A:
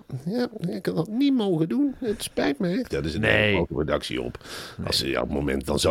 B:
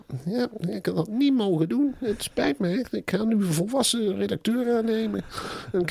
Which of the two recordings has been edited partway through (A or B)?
A